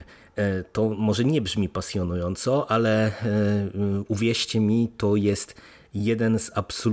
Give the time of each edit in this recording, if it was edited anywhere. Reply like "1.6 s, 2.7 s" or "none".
none